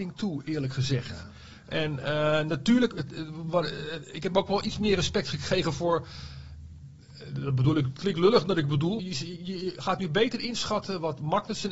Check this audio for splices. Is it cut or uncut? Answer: cut